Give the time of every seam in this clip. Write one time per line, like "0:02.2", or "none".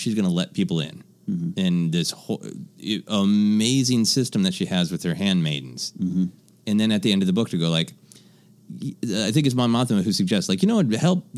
none

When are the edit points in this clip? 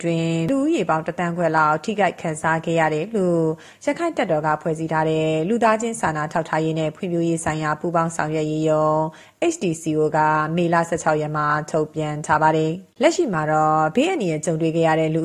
0:12.9

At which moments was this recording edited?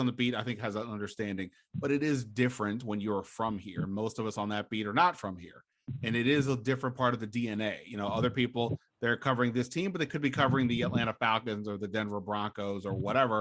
none

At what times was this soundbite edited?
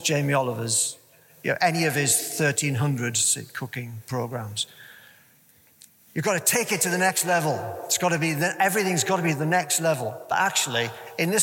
none

